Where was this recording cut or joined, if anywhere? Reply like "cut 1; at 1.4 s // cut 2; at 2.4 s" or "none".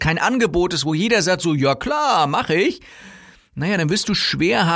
none